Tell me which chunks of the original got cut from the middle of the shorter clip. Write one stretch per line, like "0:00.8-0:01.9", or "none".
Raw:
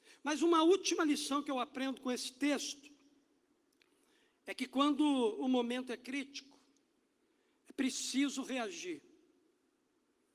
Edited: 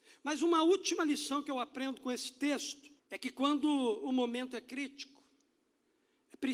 0:03.0-0:04.4